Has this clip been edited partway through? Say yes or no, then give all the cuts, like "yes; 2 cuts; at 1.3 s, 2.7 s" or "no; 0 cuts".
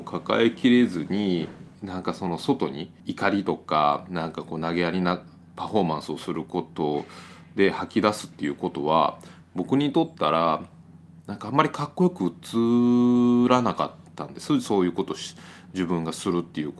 yes; 2 cuts; at 1.8 s, 3.0 s